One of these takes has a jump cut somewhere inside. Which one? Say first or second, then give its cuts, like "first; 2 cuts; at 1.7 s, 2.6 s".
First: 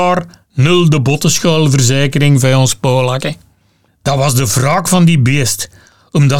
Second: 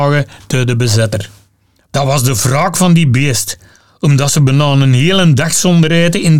second; 1 cut; at 1.8 s